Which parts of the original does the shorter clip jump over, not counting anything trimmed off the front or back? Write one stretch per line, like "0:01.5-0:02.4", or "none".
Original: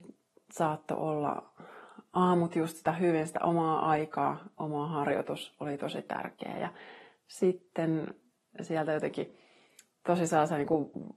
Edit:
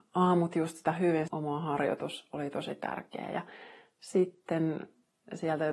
0:03.3-0:04.5